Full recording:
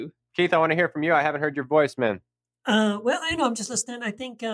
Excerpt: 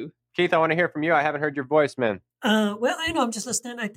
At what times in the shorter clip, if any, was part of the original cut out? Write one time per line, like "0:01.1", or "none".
0:02.3